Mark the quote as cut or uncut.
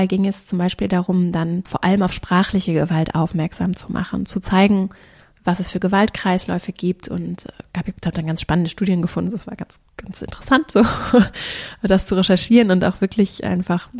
uncut